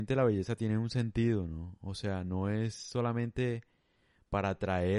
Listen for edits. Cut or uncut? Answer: uncut